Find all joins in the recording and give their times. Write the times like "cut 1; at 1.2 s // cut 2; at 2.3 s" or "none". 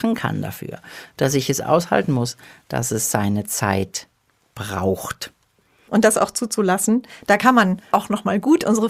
cut 1; at 5.9 s // cut 2; at 7.9 s